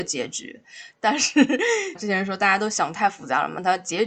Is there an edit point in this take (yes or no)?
yes